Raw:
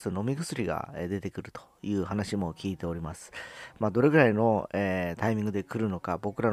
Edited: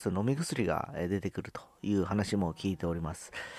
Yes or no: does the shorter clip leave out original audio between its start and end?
no